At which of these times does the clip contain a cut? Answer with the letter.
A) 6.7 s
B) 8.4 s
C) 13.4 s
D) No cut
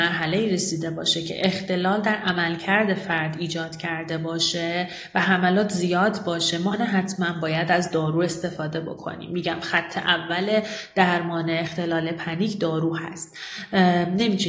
A